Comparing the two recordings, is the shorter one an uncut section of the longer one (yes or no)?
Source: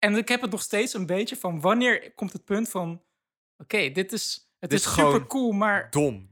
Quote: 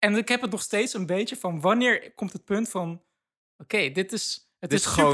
yes